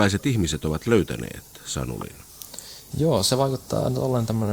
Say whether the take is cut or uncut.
uncut